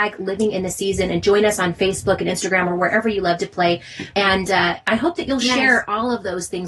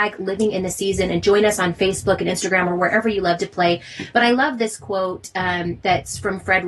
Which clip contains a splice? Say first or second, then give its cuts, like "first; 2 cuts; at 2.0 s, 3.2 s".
first; 1 cut; at 4.1 s